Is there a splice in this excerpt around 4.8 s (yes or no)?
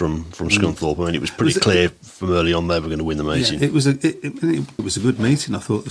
yes